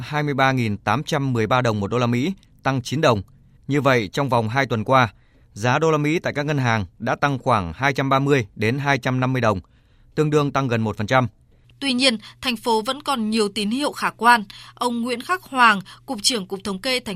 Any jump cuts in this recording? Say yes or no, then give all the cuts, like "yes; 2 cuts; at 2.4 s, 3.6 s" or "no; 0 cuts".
yes; 2 cuts; at 3.6 s, 11.6 s